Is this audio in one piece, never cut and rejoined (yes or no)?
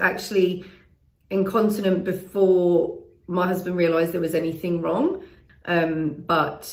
no